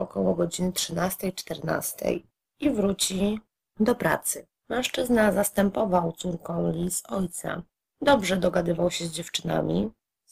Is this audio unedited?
no; 1 cut; at 4.5 s

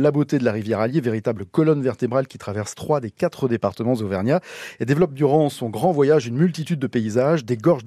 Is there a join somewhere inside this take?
no; 0 cuts

